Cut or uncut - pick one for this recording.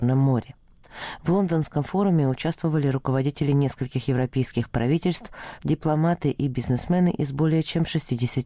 cut